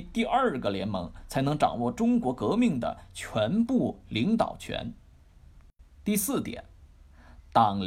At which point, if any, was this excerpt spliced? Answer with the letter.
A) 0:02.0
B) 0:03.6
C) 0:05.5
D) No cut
D